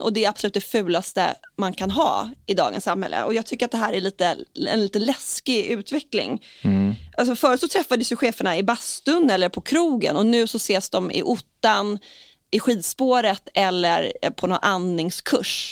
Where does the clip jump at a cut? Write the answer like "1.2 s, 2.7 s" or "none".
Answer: none